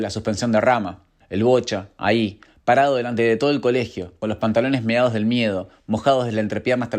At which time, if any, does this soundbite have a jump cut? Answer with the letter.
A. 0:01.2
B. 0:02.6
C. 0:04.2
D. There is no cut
A